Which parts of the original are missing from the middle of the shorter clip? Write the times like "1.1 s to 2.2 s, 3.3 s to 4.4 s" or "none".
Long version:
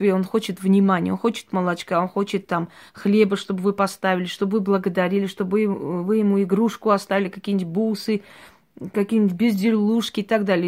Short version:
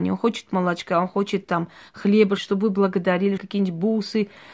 3.4 s to 4.3 s, 5.3 s to 7.3 s